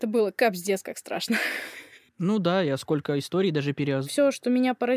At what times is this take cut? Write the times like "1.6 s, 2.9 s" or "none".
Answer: 4.0 s